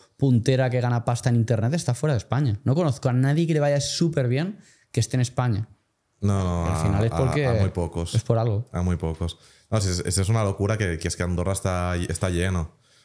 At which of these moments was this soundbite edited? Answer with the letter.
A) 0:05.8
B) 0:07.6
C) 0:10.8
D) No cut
D